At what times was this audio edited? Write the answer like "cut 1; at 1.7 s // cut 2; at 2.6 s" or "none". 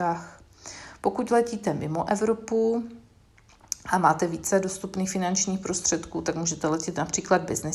none